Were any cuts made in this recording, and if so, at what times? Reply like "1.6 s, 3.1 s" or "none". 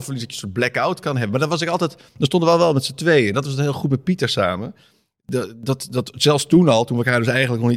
none